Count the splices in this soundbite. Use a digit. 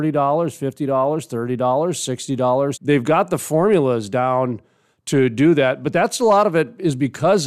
1